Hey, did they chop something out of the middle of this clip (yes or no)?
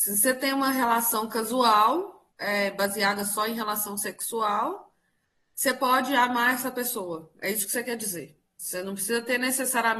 yes